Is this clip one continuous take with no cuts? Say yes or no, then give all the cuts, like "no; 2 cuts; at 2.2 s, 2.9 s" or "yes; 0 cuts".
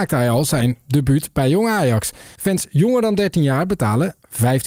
no; 1 cut; at 2.4 s